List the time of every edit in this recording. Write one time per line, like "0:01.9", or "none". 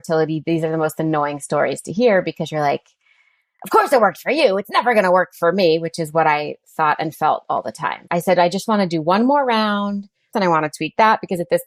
0:08.1
0:10.3